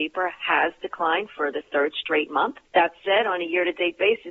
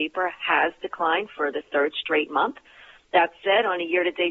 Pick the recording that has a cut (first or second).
first